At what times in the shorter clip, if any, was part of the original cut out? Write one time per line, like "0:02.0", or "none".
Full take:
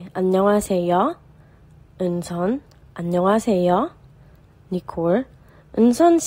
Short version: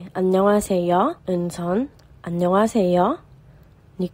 0:01.2